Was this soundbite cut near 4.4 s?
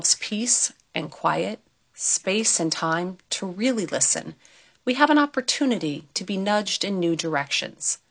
no; 0 cuts

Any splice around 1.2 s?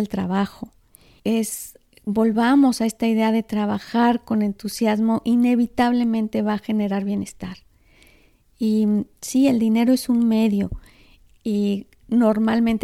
yes; 1 cut; at 1.2 s

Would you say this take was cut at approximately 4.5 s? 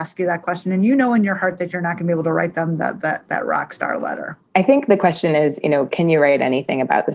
yes; 1 cut; at 4.5 s

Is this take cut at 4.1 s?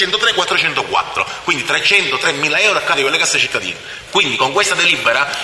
yes; 1 cut; at 4.1 s

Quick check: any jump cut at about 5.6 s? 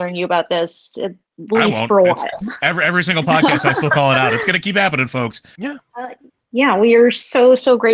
yes; 1 cut; at 5.6 s

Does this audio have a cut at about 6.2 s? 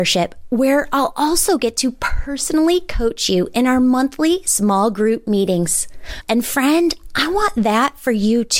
yes; 1 cut; at 6.2 s

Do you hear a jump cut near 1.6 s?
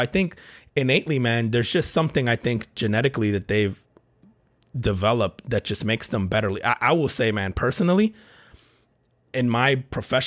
no; 0 cuts

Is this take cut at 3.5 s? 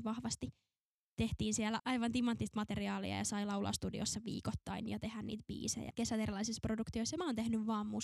no; 2 cuts; at 1.8 s, 5.9 s

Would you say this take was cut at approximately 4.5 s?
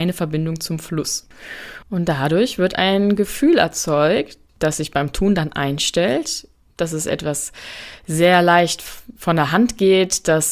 no; 2 cuts; at 1.8 s, 6.8 s

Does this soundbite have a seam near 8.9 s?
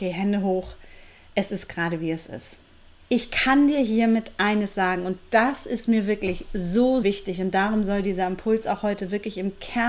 no; 2 cuts; at 3.0 s, 7.0 s

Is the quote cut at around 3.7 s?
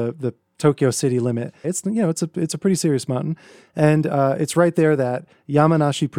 no; 1 cut; at 1.6 s

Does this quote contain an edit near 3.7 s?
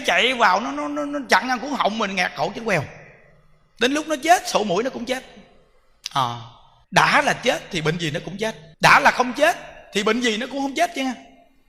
no; 2 cuts; at 6.8 s, 8.7 s

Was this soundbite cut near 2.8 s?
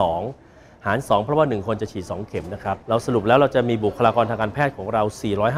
yes; 1 cut; at 2.8 s

